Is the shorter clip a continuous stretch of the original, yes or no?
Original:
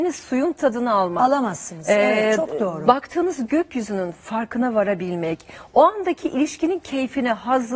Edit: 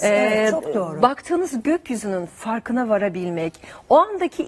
yes